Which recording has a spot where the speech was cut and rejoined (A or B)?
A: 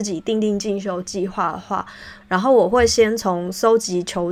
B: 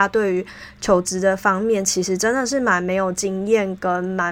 A